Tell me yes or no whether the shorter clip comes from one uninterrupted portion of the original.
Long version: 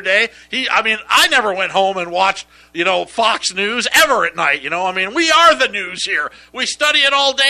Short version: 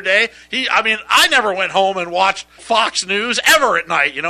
no